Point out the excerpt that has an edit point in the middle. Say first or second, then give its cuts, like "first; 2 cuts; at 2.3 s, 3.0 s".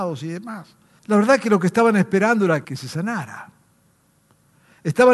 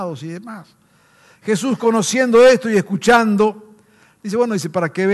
first; 2 cuts; at 1.0 s, 2.6 s